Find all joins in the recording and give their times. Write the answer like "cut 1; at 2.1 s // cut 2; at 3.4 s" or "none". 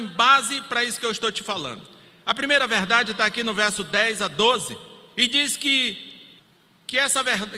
none

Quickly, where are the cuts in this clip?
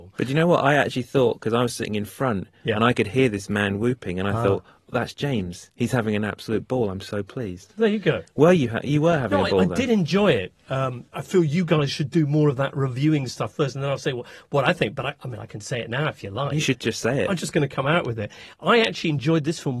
none

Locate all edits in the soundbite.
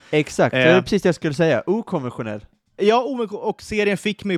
none

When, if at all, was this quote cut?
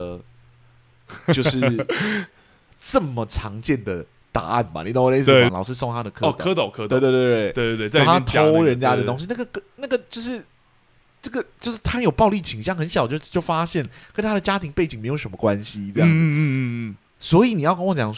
cut 1; at 5.5 s

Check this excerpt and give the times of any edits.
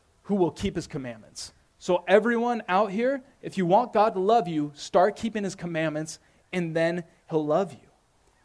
none

